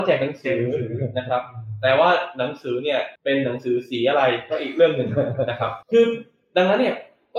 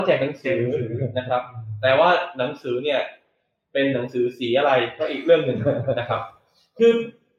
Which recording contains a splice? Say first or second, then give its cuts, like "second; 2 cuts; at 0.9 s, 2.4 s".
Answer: first; 2 cuts; at 3.2 s, 5.8 s